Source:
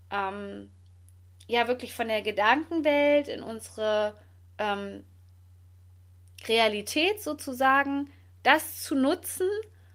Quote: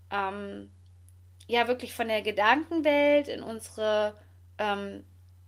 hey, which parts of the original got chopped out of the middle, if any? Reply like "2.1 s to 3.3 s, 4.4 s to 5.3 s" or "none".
none